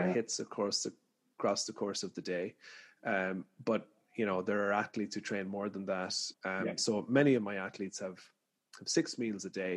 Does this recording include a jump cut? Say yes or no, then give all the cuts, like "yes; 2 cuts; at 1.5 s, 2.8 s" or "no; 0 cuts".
yes; 1 cut; at 6.3 s